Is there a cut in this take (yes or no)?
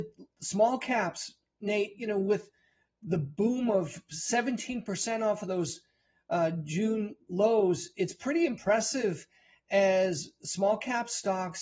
no